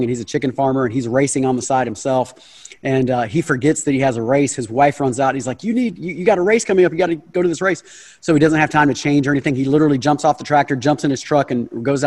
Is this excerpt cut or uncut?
uncut